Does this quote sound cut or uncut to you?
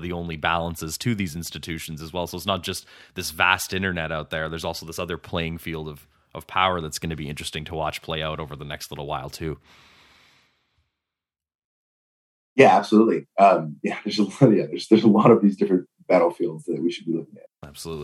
uncut